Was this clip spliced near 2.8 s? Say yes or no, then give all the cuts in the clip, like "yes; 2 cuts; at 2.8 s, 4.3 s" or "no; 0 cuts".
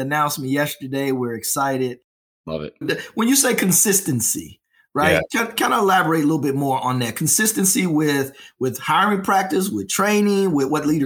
yes; 1 cut; at 2.8 s